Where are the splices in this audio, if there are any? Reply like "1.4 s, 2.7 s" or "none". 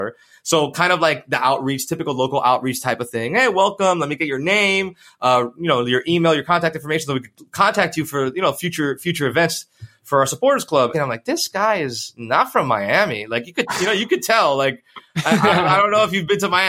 10.9 s